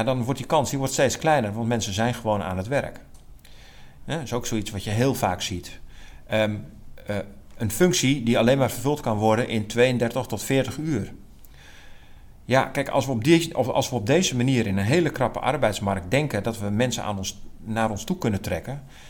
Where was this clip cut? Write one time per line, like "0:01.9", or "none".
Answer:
0:04.0